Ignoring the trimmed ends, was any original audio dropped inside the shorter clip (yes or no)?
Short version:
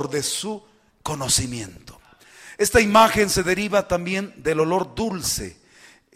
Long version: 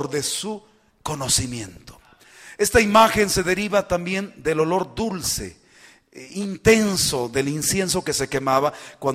no